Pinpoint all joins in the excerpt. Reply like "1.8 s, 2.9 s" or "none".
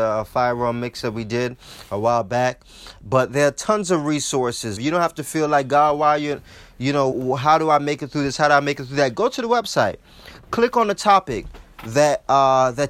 4.8 s, 7.1 s